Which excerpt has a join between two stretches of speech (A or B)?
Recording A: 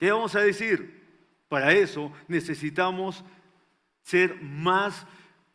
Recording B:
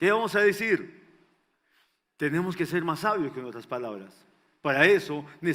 A